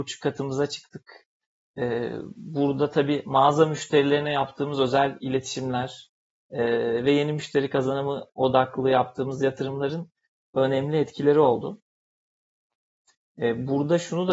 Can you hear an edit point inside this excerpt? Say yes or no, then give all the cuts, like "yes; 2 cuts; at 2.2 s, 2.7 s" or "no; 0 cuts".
no; 0 cuts